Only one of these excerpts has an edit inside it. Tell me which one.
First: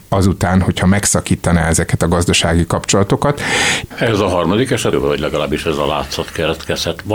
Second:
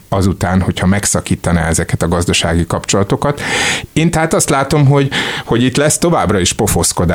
first; 2 cuts; at 3.9 s, 4.9 s

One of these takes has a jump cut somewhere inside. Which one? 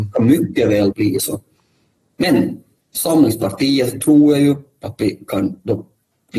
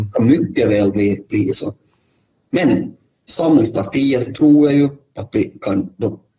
first; 1 cut; at 0.9 s

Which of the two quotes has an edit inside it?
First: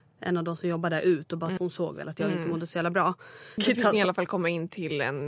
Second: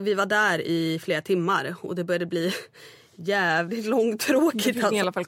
first; 2 cuts; at 1.6 s, 3.6 s

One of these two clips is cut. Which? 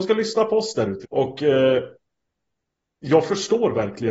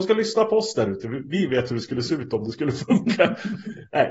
first; 1 cut; at 1.0 s

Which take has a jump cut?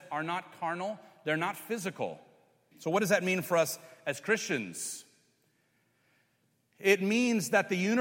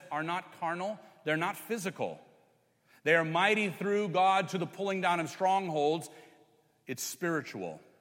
first; 1 cut; at 2.7 s

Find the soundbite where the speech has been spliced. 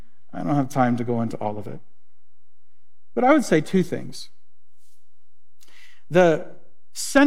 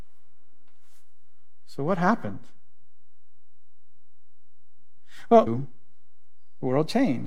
second; 1 cut; at 5.5 s

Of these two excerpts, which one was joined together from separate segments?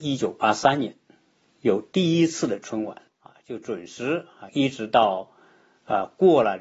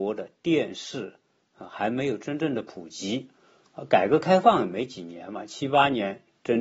first; 2 cuts; at 3.1 s, 4.5 s

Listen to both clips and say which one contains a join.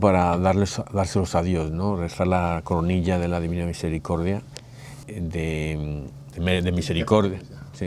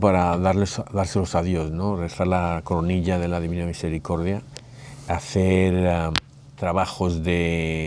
first; 2 cuts; at 5.0 s, 6.3 s

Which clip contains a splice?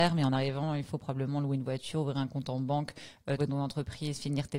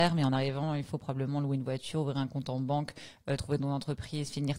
first; 1 cut; at 3.4 s

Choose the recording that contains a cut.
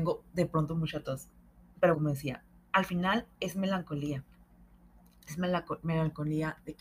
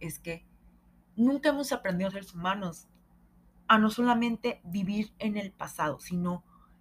first; 1 cut; at 1.9 s

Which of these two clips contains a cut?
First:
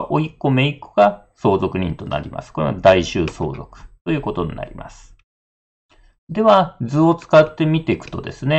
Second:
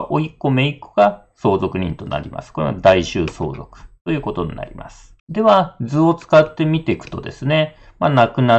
second; 1 cut; at 5.2 s

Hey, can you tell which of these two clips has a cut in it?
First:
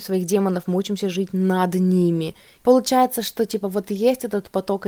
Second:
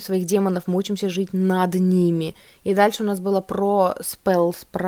first; 1 cut; at 2.6 s

